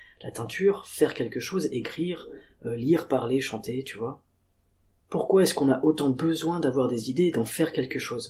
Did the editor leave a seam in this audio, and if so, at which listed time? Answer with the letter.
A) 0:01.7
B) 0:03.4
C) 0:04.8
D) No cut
D